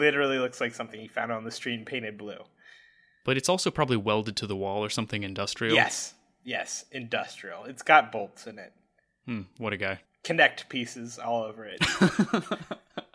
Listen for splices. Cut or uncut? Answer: cut